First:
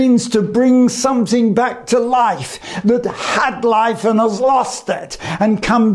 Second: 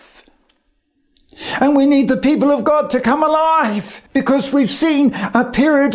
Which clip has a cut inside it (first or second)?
second